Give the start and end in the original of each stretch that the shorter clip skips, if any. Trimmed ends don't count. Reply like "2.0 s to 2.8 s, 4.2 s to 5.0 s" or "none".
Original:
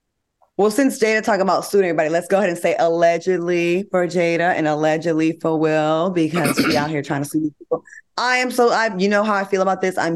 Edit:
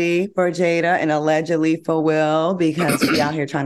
none